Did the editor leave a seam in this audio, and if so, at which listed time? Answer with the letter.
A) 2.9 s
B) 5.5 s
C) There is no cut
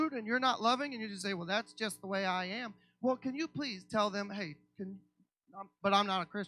C